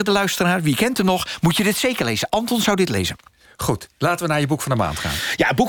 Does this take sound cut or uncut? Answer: uncut